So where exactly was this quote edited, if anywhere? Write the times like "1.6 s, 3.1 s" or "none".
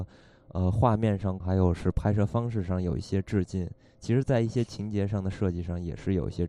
1.4 s